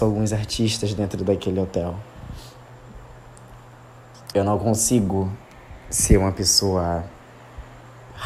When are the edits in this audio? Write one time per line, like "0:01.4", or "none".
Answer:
0:04.3